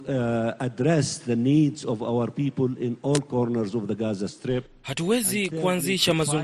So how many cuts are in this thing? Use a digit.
0